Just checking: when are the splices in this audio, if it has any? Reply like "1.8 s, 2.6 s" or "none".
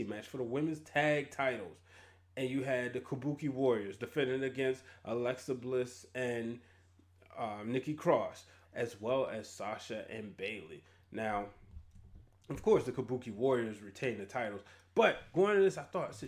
8.6 s